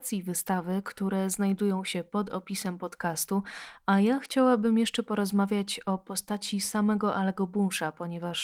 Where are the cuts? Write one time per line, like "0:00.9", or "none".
none